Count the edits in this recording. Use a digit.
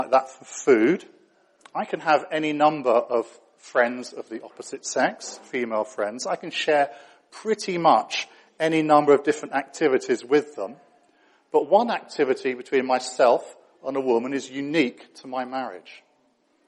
1